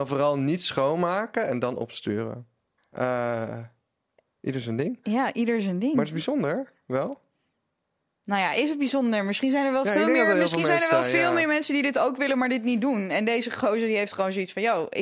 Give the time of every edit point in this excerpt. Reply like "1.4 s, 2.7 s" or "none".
2.8 s